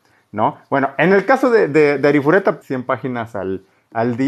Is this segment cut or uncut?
cut